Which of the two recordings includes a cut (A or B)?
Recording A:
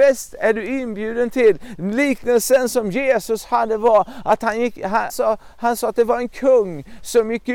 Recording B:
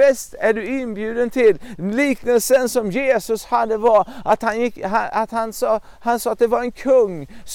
A